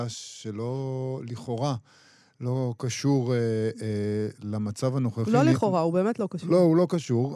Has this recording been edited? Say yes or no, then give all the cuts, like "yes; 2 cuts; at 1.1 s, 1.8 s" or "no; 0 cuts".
no; 0 cuts